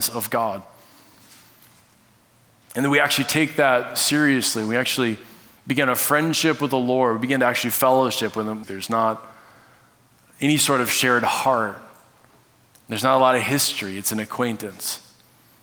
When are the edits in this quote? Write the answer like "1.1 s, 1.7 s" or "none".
8.6 s